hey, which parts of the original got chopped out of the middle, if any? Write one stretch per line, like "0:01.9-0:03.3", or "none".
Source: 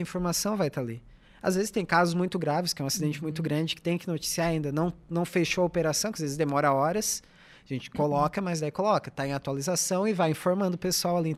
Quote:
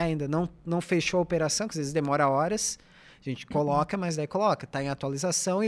none